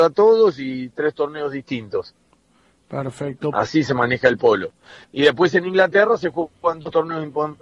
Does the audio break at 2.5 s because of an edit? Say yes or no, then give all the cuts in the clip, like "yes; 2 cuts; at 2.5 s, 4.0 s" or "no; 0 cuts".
no; 0 cuts